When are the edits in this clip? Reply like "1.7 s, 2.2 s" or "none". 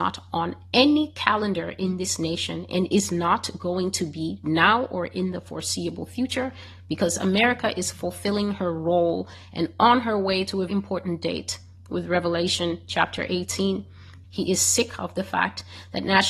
10.7 s, 14.2 s